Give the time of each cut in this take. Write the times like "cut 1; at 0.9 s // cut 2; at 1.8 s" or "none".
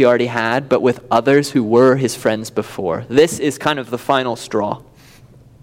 none